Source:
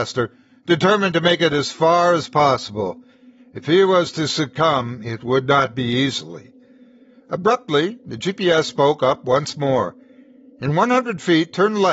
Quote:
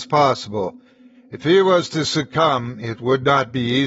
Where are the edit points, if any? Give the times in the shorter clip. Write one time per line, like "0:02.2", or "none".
none